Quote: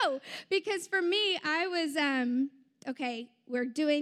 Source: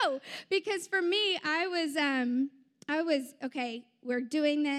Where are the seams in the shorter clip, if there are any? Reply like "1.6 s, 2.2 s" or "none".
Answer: 2.8 s